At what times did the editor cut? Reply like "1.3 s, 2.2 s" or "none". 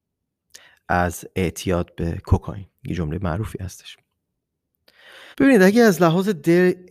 2.8 s, 5.3 s